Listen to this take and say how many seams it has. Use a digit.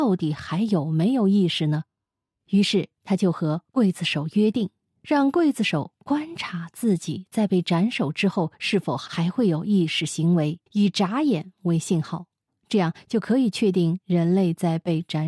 1